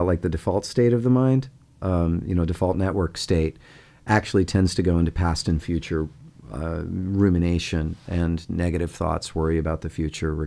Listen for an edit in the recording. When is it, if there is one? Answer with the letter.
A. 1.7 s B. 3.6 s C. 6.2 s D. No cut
D